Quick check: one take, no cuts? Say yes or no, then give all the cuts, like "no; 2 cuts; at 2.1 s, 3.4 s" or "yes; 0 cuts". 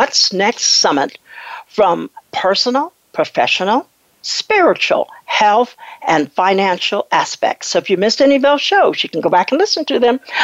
yes; 0 cuts